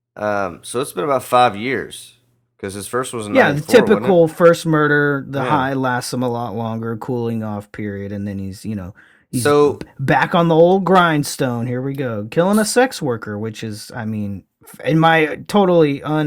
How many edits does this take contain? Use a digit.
0